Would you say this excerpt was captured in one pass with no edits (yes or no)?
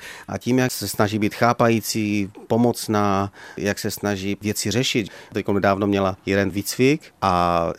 yes